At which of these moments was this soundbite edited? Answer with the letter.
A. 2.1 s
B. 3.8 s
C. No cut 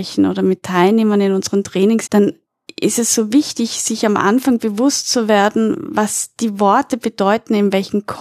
A